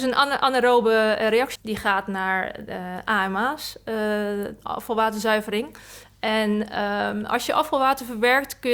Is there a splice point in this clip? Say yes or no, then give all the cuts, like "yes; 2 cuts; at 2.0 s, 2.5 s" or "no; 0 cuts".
yes; 2 cuts; at 1.6 s, 6.0 s